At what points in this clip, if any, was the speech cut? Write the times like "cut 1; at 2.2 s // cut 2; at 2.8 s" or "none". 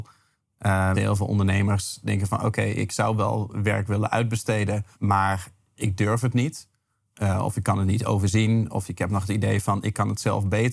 cut 1; at 0.9 s // cut 2; at 4.9 s